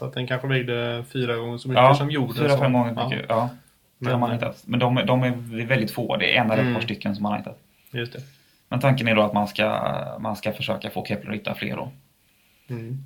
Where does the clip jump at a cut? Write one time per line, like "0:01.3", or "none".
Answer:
none